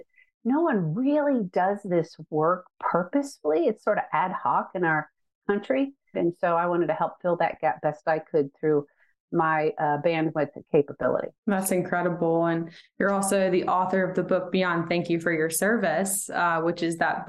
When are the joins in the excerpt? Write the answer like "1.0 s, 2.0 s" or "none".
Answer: 6.1 s, 11.4 s